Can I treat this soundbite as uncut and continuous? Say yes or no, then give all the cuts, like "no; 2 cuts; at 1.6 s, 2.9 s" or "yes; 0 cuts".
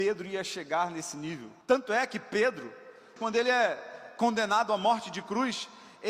no; 2 cuts; at 1.6 s, 3.2 s